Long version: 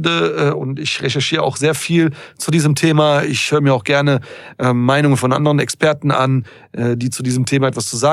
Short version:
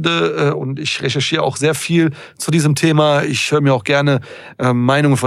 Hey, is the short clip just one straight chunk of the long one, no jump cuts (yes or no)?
yes